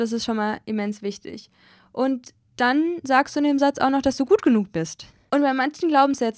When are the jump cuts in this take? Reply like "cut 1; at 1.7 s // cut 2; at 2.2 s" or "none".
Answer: cut 1; at 5.3 s

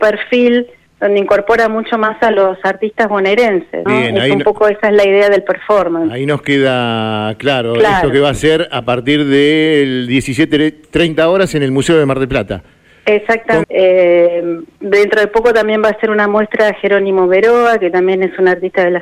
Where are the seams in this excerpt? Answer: cut 1; at 3.9 s // cut 2; at 13.6 s

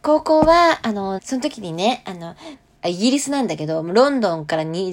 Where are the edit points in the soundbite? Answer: cut 1; at 1.2 s // cut 2; at 2.8 s

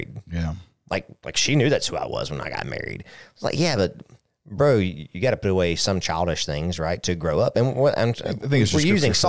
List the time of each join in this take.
none

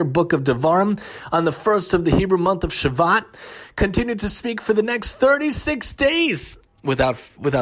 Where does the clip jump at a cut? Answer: none

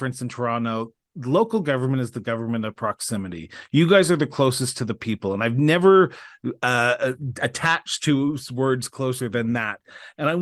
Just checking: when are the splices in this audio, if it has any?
none

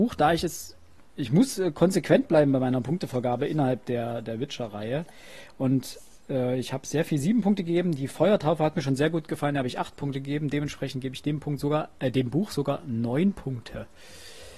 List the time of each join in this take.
none

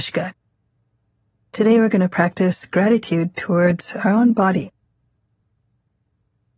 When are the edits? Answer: none

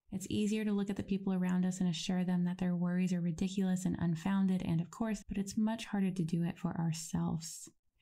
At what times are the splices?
cut 1; at 5.2 s

